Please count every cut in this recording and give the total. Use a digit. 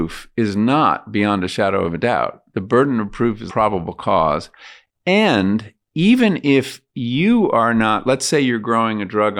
1